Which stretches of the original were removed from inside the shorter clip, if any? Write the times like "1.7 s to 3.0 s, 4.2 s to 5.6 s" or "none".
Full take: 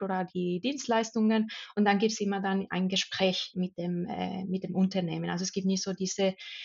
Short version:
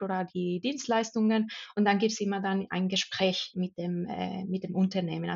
none